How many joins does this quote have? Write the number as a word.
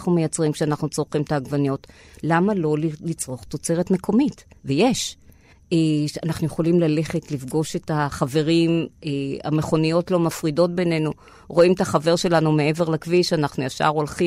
one